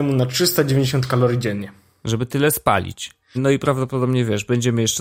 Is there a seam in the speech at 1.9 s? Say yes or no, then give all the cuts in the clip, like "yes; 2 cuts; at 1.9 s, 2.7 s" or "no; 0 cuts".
no; 1 cut; at 3.4 s